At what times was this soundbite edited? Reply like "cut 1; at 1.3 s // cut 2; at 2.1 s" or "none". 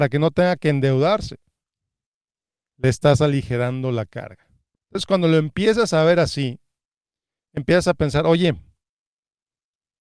cut 1; at 4.7 s